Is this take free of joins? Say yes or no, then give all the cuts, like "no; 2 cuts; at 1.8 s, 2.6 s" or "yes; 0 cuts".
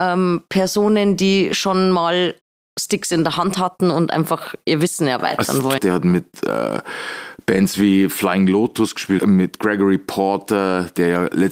no; 2 cuts; at 5.8 s, 9.2 s